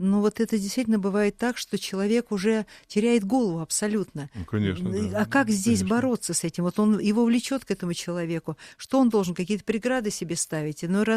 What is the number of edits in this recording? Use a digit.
0